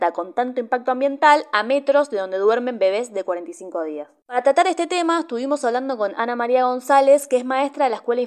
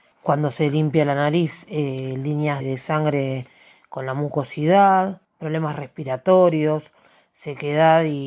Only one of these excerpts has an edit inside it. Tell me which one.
second; 1 cut; at 2.6 s

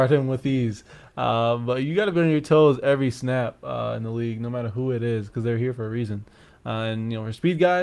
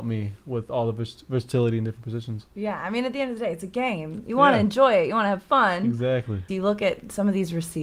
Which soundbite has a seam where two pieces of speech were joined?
second; 1 cut; at 6.5 s

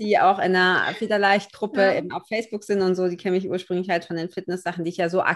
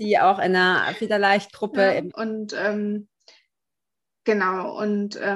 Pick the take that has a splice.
second; 1 cut; at 2.1 s

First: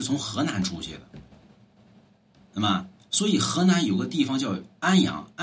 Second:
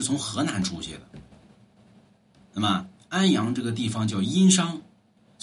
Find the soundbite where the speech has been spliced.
second; 1 cut; at 3.1 s

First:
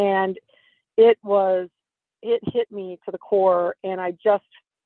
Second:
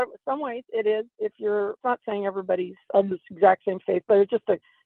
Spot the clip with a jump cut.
second; 1 cut; at 1.8 s

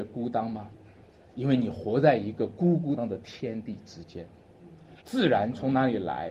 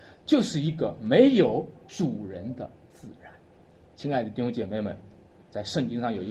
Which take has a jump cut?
first; 2 cuts; at 3.0 s, 5.0 s

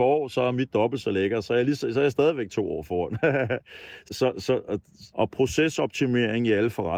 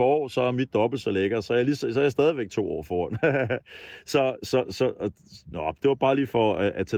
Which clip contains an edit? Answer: first; 2 cuts; at 4.1 s, 5.1 s

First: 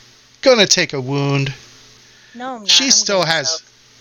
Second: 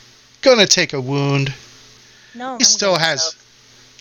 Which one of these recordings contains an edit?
second; 1 cut; at 2.6 s

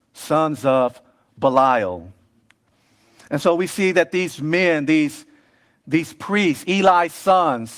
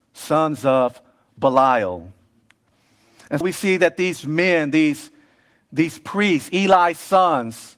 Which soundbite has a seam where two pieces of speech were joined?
second; 1 cut; at 3.4 s

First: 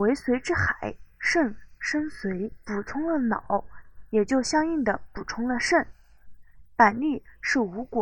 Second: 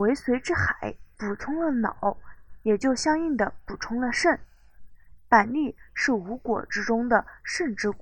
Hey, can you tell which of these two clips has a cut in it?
second; 1 cut; at 1.1 s

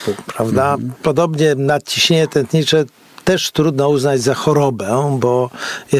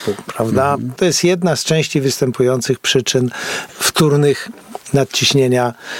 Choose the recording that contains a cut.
second; 1 cut; at 1.0 s

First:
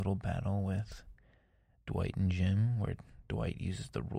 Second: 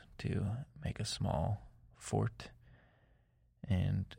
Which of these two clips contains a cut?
second; 1 cut; at 1.9 s

